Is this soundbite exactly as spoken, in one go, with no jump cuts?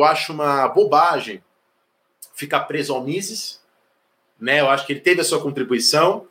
yes; 0 cuts

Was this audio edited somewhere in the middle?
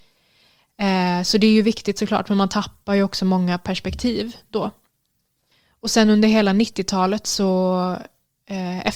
no; 0 cuts

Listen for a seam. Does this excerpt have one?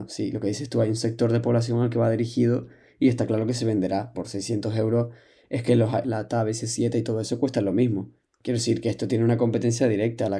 yes; 2 cuts; at 4.1 s, 6.0 s

